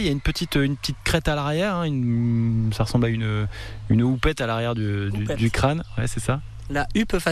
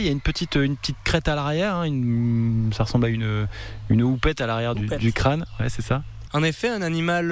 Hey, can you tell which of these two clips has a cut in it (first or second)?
second